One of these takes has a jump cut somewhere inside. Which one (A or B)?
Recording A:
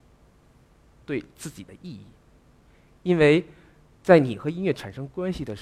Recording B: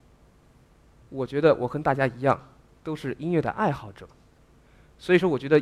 A